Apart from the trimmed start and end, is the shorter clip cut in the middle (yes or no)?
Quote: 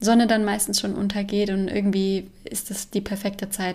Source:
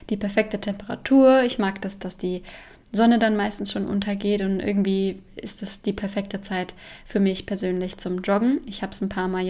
no